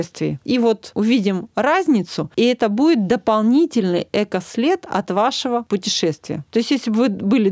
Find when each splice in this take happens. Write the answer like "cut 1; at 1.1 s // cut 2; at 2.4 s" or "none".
none